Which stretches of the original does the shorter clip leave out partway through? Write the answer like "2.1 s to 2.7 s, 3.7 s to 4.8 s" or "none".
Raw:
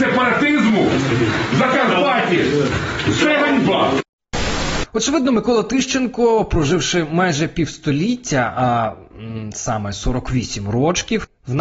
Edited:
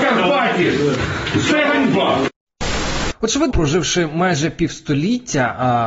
5.2 s to 6.5 s